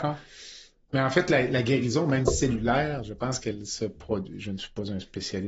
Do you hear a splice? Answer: no; 0 cuts

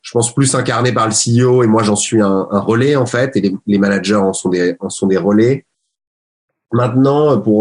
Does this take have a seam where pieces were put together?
no; 0 cuts

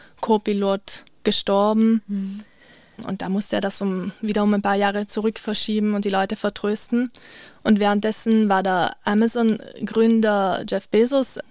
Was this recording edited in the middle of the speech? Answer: no; 0 cuts

